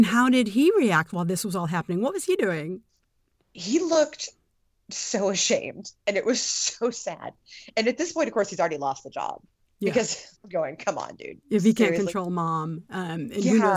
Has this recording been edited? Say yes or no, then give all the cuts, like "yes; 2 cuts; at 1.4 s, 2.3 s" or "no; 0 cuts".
no; 0 cuts